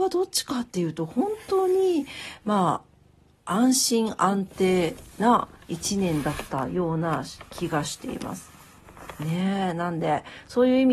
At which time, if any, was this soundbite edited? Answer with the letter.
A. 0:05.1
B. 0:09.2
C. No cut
A